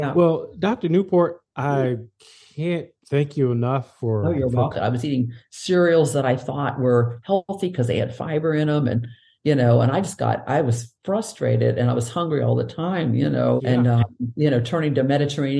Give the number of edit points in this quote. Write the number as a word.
two